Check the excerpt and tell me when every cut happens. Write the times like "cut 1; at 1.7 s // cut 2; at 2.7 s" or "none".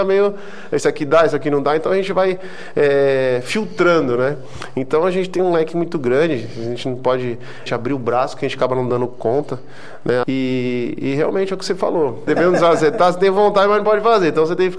cut 1; at 7.7 s // cut 2; at 10.2 s // cut 3; at 12.3 s